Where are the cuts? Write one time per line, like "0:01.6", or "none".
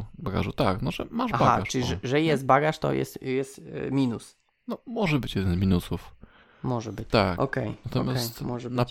0:07.1